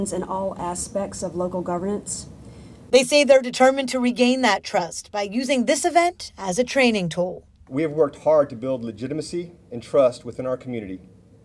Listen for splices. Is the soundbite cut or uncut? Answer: cut